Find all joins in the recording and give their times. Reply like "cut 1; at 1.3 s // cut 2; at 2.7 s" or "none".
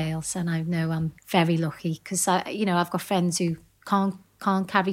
cut 1; at 1.2 s